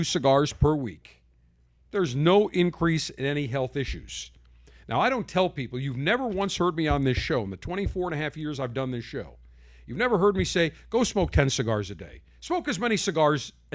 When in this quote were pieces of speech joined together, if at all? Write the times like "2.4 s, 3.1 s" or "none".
none